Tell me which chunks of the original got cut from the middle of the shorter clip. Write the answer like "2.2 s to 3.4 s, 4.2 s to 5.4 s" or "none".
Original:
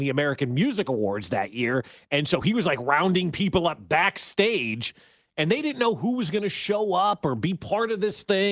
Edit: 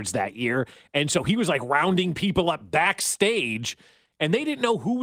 none